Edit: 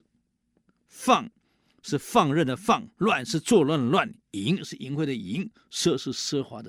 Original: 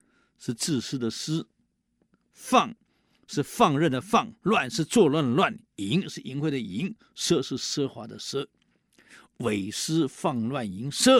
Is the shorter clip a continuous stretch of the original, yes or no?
yes